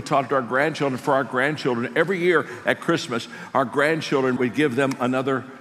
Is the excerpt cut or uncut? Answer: cut